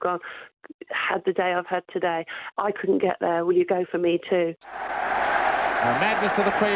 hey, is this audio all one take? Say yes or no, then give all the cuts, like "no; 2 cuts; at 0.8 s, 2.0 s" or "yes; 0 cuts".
no; 2 cuts; at 2.5 s, 4.6 s